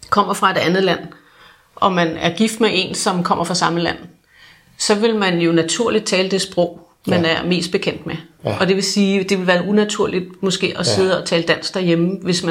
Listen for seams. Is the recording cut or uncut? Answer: uncut